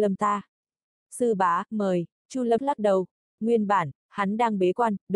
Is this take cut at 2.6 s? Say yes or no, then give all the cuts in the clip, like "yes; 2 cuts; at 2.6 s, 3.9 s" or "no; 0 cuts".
yes; 1 cut; at 2.6 s